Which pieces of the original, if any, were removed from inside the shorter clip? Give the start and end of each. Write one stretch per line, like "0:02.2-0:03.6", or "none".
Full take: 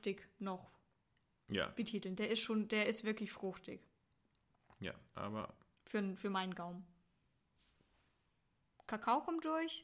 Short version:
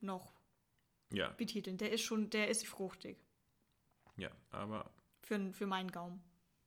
0:03.0-0:03.3